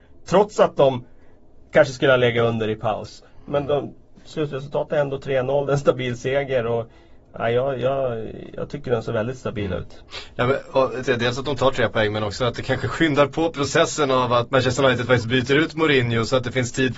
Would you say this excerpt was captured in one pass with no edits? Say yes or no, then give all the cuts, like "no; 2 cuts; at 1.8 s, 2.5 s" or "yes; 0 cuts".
no; 2 cuts; at 11.0 s, 14.5 s